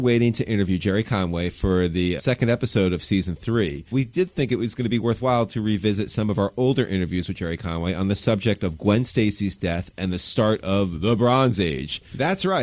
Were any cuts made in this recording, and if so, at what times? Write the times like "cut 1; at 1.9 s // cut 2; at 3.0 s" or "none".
cut 1; at 2.2 s // cut 2; at 3.9 s

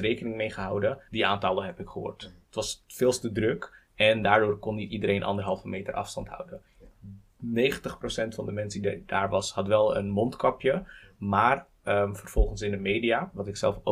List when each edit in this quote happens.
cut 1; at 1.1 s

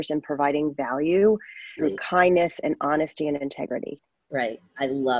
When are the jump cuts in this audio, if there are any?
cut 1; at 1.8 s

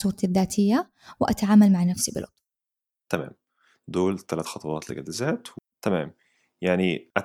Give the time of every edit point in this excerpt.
cut 1; at 5.7 s

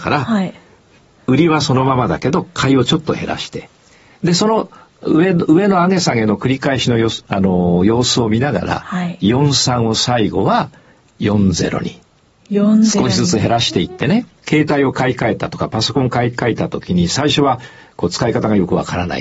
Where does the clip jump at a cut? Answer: cut 1; at 14.4 s

